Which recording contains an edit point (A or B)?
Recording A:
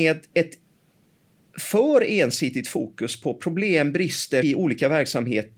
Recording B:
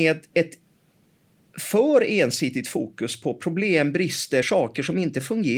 A